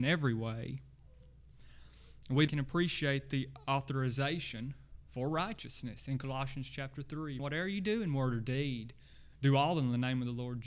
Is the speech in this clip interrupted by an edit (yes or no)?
yes